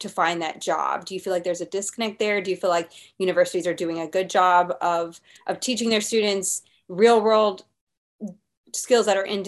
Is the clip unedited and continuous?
yes; 0 cuts

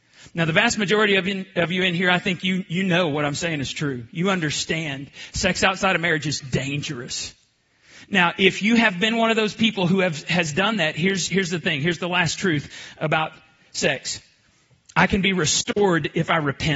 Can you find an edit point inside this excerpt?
no; 0 cuts

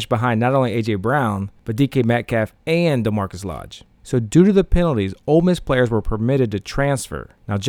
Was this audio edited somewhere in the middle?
yes; 1 cut; at 4.0 s

